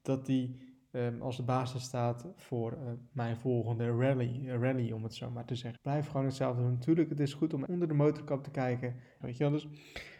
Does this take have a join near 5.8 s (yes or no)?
yes